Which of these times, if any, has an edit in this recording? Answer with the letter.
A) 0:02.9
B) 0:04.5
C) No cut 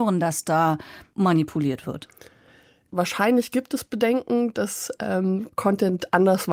A